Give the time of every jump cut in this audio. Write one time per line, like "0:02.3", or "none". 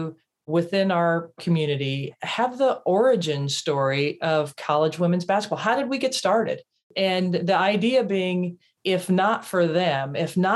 none